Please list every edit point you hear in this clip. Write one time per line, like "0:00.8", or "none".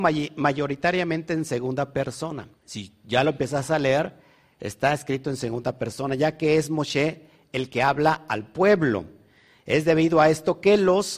0:02.6